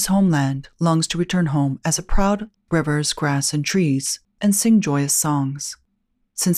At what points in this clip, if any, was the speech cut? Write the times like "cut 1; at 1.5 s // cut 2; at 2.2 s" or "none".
cut 1; at 2.6 s // cut 2; at 4.3 s